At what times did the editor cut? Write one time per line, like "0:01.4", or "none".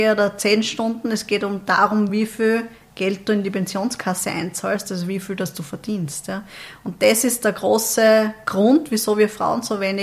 none